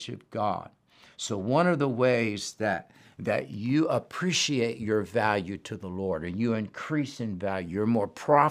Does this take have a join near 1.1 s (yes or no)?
no